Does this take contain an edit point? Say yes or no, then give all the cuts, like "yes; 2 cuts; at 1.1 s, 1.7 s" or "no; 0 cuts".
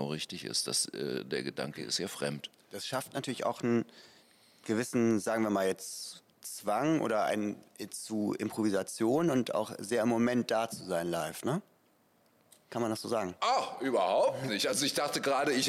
no; 0 cuts